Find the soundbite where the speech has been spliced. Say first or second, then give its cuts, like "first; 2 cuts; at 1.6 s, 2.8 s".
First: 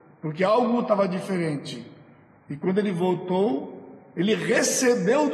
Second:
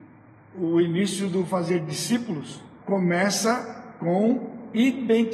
second; 1 cut; at 2.8 s